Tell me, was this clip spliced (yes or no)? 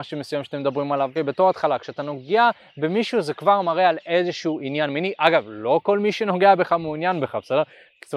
yes